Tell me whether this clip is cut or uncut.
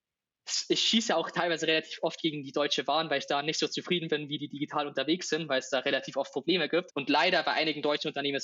cut